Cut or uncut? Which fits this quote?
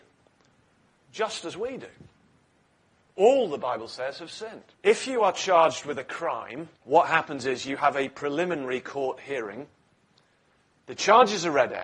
cut